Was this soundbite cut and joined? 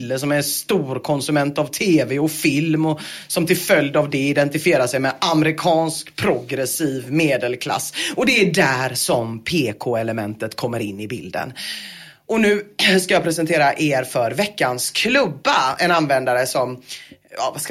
no; 0 cuts

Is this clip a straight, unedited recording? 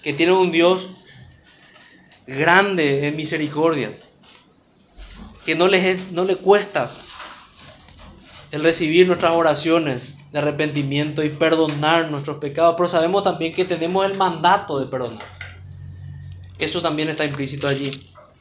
no; 1 cut; at 5.4 s

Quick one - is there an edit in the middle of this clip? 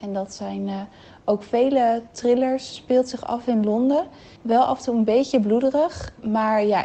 no; 0 cuts

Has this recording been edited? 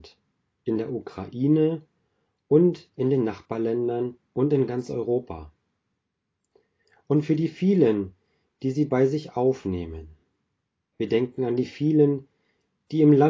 no; 0 cuts

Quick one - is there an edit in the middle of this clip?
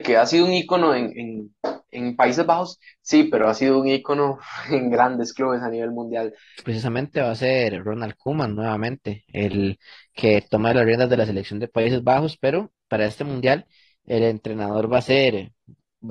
yes; 1 cut; at 6.6 s

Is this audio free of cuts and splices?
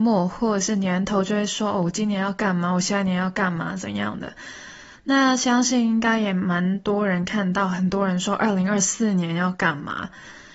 yes; 0 cuts

